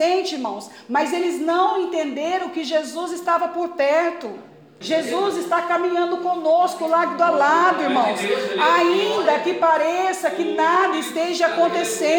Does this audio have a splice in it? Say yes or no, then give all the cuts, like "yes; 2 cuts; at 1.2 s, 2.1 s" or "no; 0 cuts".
yes; 1 cut; at 4.8 s